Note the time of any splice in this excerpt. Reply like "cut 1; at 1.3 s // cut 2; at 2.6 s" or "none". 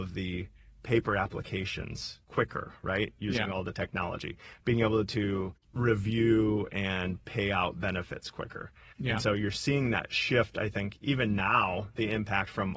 cut 1; at 8.9 s